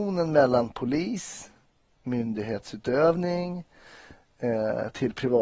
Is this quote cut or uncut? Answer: uncut